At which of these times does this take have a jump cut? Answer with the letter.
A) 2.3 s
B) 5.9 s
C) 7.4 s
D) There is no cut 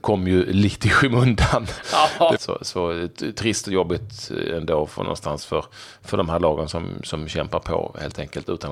A